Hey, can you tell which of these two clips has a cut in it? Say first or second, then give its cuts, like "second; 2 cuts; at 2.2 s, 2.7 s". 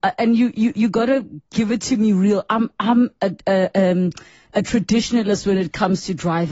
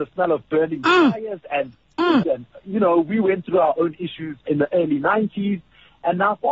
second; 2 cuts; at 2.2 s, 4.5 s